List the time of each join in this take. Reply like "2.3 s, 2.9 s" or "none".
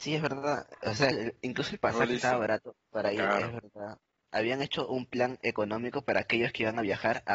1.1 s